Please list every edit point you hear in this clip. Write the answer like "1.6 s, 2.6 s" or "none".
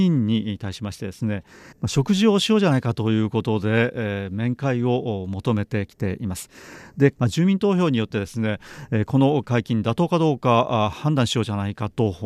7.2 s

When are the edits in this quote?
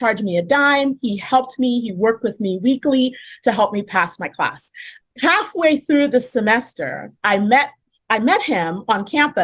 5.0 s, 7.2 s

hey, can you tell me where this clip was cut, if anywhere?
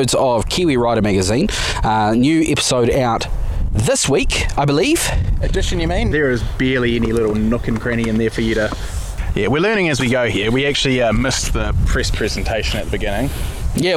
6.1 s

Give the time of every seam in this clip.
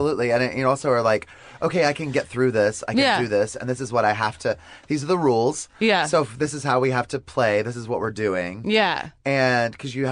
none

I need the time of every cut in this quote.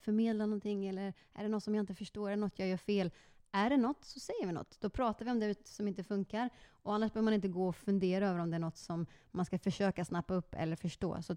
none

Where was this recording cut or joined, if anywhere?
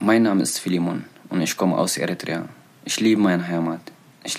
none

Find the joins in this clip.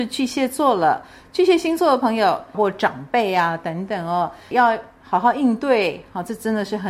2.5 s, 4.5 s

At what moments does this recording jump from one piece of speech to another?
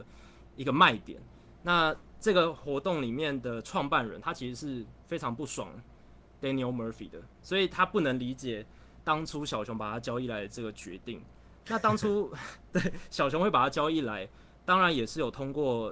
1.5 s

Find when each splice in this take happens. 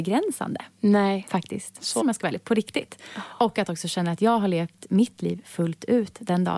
2.0 s

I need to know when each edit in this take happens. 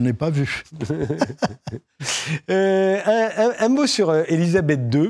none

